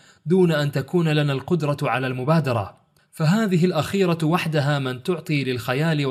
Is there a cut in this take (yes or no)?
no